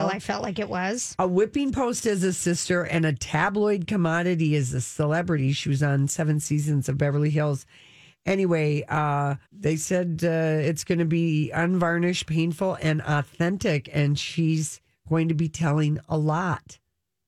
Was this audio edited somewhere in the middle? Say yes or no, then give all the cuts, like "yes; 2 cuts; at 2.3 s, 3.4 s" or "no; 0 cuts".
yes; 1 cut; at 9.4 s